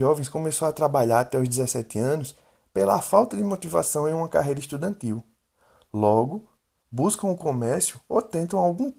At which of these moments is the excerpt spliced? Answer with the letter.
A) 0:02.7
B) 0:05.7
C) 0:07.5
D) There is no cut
D